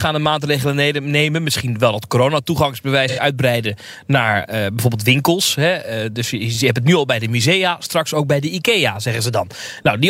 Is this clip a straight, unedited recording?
yes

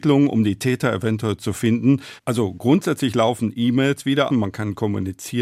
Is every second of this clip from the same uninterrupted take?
no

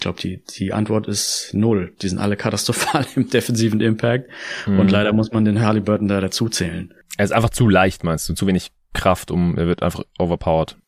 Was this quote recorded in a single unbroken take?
yes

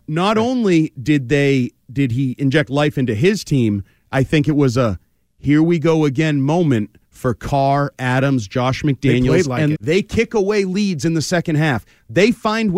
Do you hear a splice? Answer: yes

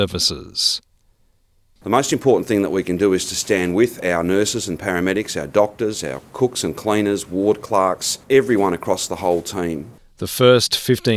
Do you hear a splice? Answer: yes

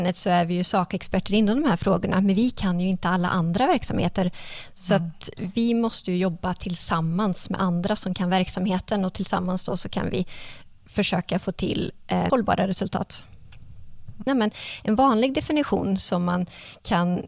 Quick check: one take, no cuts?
no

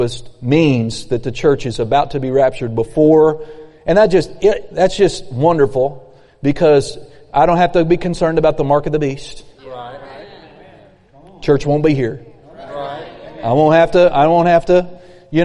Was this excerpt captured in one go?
yes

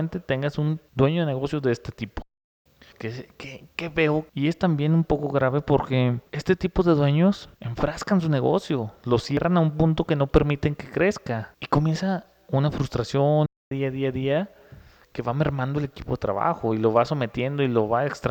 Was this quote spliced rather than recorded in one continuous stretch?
yes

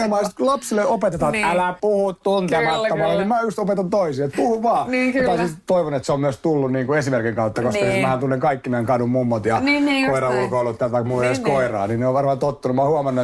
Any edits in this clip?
no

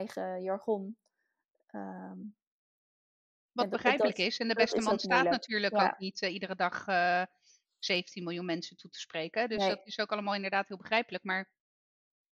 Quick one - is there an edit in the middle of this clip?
no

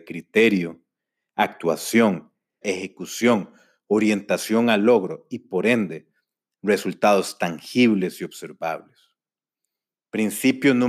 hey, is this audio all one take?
no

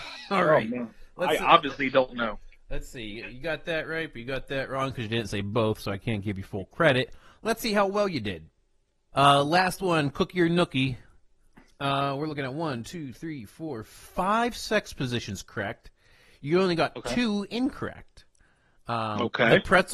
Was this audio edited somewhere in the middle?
yes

